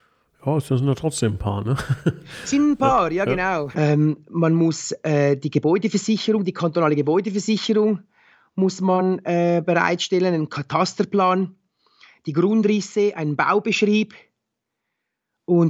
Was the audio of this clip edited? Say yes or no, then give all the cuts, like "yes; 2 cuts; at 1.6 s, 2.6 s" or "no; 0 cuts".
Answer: yes; 1 cut; at 3.7 s